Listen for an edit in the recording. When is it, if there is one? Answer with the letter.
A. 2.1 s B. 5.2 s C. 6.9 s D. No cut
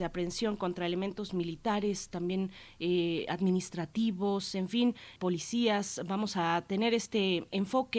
B